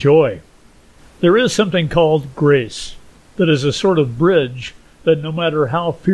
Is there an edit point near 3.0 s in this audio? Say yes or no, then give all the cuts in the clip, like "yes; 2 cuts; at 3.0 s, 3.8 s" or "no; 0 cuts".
no; 1 cut; at 1.0 s